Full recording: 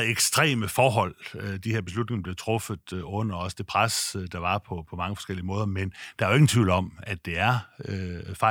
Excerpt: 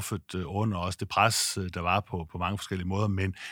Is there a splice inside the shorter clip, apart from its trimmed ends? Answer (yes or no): no